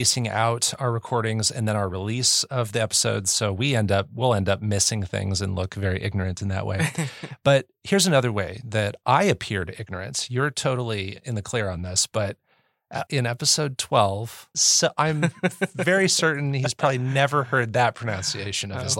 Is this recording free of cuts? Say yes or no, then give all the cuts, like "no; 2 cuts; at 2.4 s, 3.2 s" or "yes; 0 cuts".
no; 2 cuts; at 13.1 s, 14.5 s